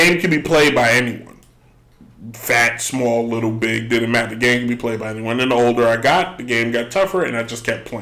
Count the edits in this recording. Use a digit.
0